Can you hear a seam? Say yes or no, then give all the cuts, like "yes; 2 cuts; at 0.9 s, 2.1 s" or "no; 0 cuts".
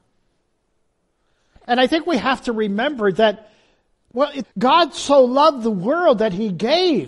yes; 1 cut; at 4.4 s